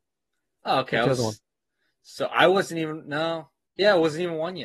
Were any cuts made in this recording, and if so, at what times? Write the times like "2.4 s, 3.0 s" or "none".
none